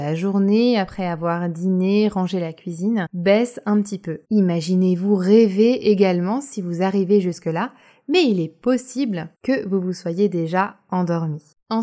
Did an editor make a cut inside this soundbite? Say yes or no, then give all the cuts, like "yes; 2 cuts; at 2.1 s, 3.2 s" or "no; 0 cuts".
yes; 2 cuts; at 4.2 s, 9.3 s